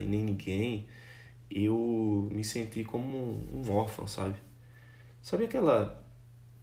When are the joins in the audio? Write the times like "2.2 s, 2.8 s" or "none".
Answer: none